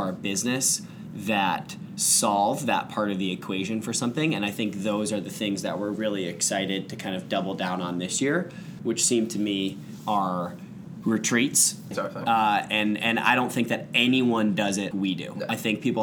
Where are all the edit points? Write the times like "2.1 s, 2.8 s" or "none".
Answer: 8.8 s, 11.9 s, 14.9 s